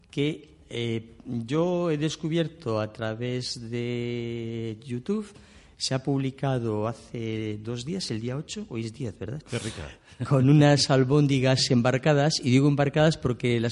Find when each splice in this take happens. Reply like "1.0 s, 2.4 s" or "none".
9.4 s